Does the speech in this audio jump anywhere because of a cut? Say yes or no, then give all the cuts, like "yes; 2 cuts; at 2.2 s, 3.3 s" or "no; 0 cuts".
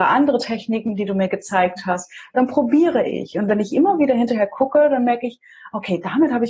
no; 0 cuts